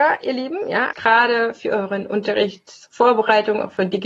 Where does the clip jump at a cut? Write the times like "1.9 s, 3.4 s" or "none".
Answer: 0.9 s